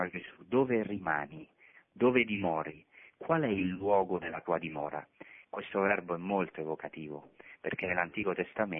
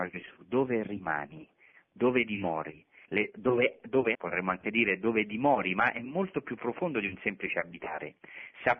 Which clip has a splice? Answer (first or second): second